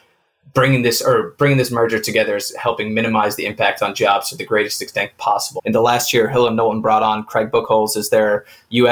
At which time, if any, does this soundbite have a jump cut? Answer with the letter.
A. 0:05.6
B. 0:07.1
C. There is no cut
A